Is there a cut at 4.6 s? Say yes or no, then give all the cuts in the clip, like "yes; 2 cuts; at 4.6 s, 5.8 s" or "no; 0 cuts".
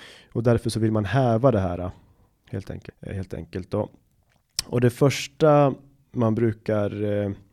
no; 1 cut; at 2.9 s